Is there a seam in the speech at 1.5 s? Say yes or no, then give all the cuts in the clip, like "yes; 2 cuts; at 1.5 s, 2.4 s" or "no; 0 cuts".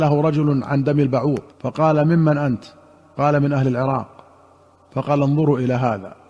yes; 1 cut; at 1.5 s